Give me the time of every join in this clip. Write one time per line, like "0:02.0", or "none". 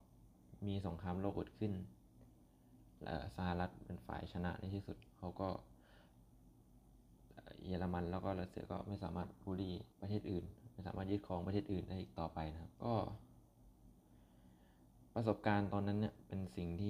0:09.9
0:12.7